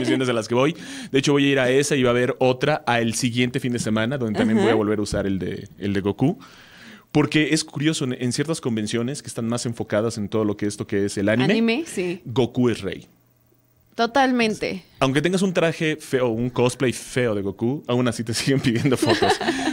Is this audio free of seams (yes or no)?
yes